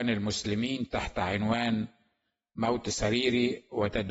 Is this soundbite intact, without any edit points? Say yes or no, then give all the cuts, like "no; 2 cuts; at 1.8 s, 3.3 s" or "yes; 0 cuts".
yes; 0 cuts